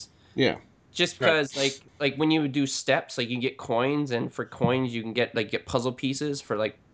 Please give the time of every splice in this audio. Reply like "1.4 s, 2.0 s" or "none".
1.9 s